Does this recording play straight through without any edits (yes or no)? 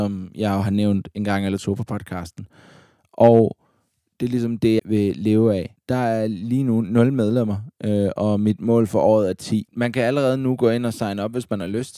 no